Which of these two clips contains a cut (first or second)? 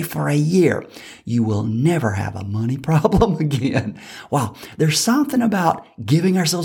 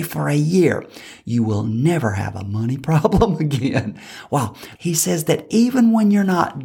second